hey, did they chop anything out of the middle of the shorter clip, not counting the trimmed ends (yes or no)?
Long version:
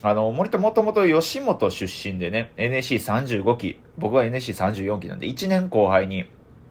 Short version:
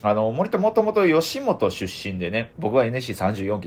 yes